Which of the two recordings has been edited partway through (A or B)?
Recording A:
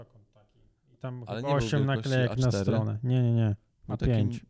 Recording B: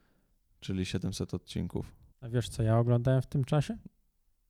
B